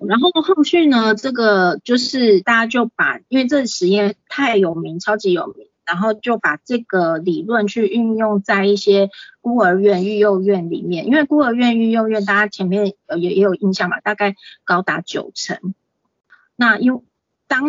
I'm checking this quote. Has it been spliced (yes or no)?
yes